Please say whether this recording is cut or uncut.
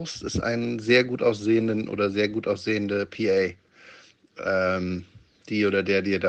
uncut